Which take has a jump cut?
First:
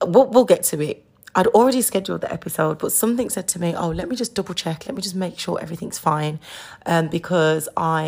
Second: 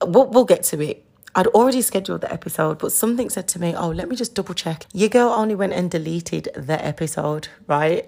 second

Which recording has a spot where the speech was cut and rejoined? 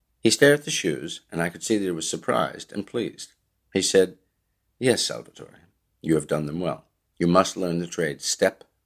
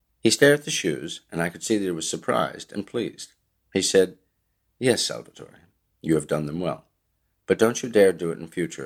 first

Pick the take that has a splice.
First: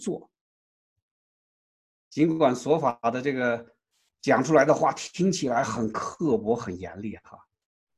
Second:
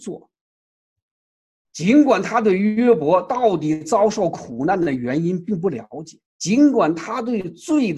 second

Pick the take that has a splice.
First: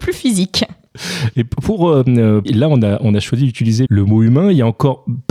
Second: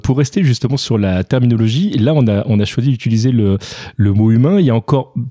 first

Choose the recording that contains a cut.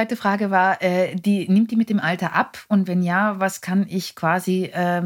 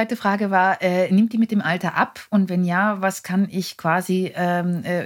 second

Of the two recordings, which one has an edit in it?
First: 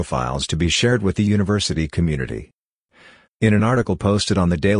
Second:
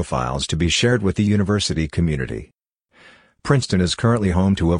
first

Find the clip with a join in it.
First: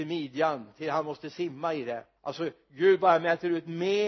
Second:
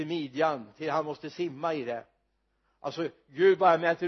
first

